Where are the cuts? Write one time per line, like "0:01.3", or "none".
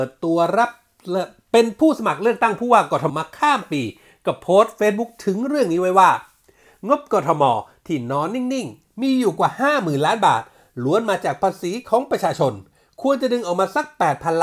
0:03.1